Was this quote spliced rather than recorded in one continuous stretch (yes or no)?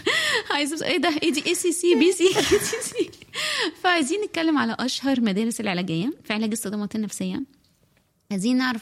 yes